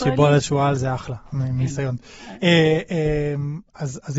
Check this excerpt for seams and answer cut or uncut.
uncut